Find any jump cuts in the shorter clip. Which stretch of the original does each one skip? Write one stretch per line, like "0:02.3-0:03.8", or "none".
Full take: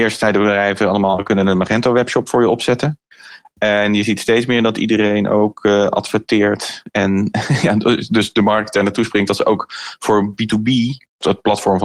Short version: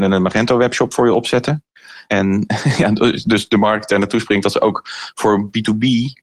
0:03.4-0:06.9

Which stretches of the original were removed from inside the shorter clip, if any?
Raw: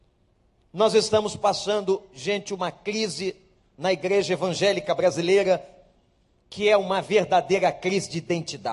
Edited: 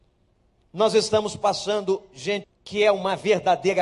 0:02.4-0:06.3

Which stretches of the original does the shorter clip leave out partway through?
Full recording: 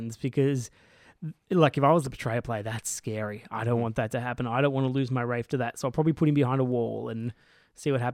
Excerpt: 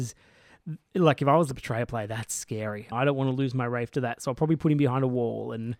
0:03.5-0:04.5

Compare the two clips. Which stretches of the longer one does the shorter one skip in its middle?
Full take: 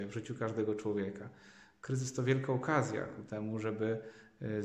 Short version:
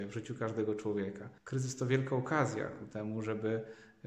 0:01.4-0:01.7

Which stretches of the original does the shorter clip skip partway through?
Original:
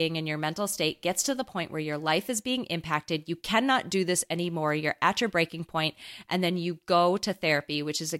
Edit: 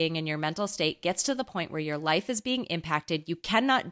none

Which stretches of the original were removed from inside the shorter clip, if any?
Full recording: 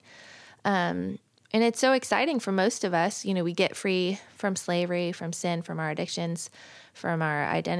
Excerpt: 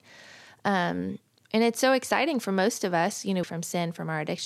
0:03.4-0:05.1

